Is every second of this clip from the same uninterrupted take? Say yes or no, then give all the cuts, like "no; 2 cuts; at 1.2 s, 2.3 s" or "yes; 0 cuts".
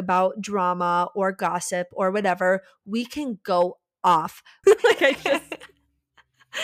no; 1 cut; at 4.6 s